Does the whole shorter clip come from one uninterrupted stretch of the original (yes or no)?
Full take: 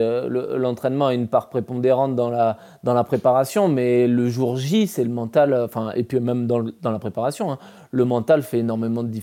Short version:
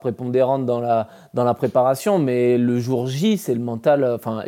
yes